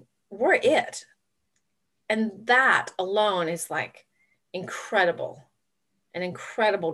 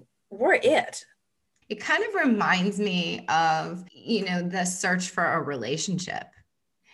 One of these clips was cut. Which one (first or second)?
second